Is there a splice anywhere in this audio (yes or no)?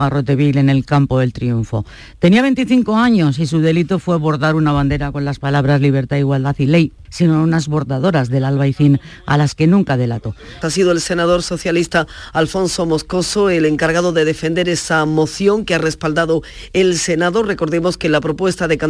yes